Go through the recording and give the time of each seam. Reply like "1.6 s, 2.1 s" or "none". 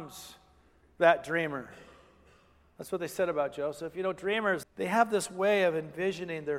4.6 s